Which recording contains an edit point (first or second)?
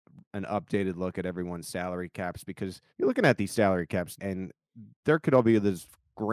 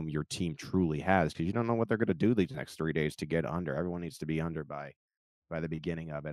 first